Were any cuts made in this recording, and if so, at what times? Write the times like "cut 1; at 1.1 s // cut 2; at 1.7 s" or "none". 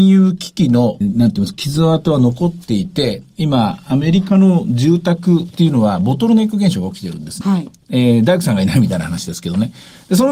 cut 1; at 1.0 s // cut 2; at 7.4 s